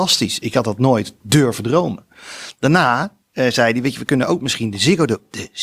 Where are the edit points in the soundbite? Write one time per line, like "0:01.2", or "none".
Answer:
none